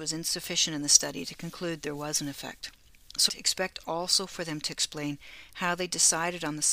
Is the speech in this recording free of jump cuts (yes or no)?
no